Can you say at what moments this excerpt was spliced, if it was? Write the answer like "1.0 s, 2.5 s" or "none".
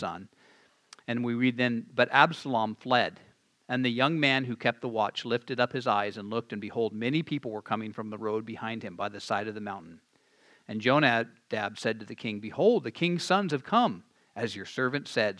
none